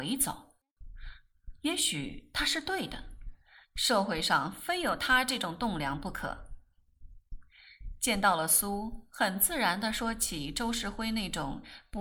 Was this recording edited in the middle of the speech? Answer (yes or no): no